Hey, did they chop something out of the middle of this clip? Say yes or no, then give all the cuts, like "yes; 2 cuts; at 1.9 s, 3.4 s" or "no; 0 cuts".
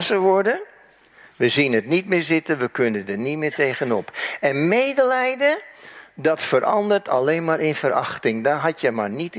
yes; 1 cut; at 1.3 s